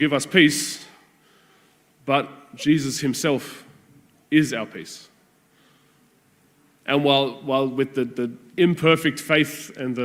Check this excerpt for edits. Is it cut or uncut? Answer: uncut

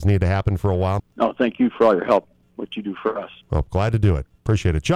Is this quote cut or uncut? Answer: cut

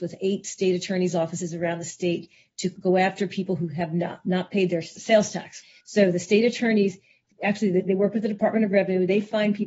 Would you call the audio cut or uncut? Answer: uncut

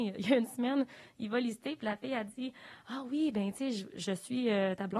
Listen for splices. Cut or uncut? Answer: uncut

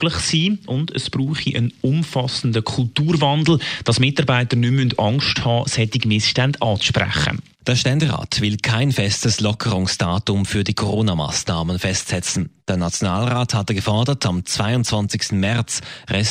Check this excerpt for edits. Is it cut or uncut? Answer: cut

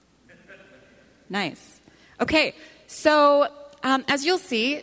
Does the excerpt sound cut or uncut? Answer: uncut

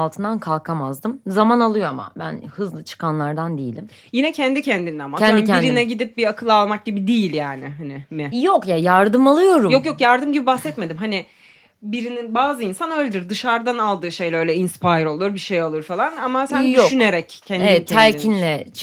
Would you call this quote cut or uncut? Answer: uncut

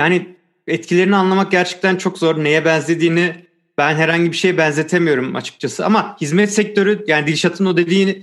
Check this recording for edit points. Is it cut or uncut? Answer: uncut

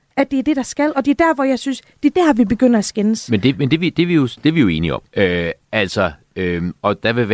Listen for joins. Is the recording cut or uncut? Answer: cut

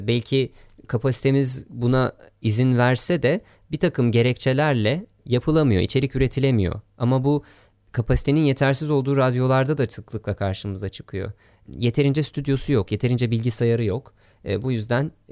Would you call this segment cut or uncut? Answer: uncut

